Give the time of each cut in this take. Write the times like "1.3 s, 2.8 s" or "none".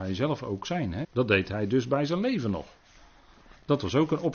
1.0 s